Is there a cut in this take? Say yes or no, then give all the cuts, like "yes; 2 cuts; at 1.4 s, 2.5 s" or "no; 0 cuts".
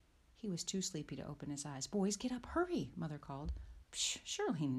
yes; 1 cut; at 3.8 s